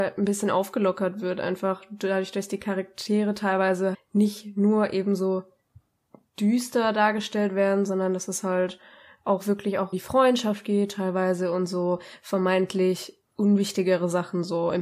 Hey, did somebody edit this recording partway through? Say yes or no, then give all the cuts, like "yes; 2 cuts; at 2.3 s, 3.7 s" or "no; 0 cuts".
yes; 2 cuts; at 3.9 s, 9.9 s